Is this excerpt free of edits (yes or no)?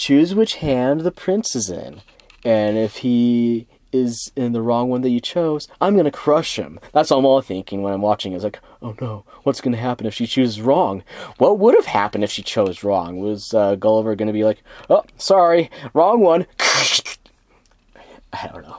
yes